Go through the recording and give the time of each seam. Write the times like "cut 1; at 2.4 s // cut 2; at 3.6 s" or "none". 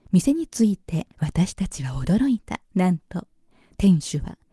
cut 1; at 1.1 s // cut 2; at 2.6 s